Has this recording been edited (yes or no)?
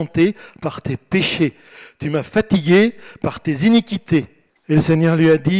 yes